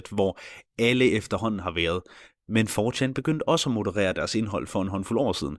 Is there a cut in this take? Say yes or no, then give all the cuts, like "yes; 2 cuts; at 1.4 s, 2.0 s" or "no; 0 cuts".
no; 0 cuts